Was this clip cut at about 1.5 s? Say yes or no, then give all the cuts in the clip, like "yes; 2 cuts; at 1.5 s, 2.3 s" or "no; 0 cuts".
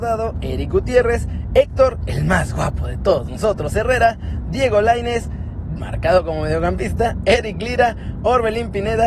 no; 1 cut; at 5.8 s